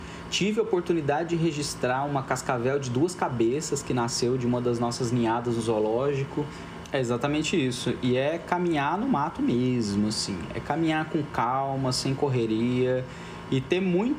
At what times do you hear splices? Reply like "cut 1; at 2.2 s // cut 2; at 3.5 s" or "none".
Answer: cut 1; at 6.8 s